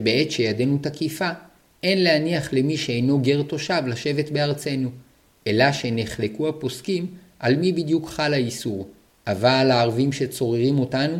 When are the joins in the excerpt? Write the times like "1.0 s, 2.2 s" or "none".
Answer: 9.1 s